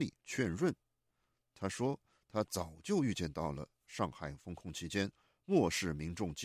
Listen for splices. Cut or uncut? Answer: uncut